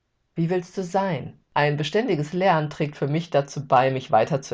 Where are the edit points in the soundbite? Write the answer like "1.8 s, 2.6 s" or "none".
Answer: 1.4 s